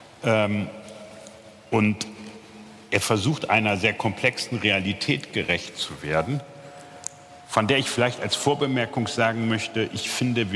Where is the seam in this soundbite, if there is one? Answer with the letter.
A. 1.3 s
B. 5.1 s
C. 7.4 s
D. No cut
C